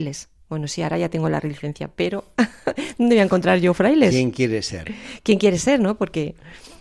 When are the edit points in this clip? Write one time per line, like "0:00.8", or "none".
none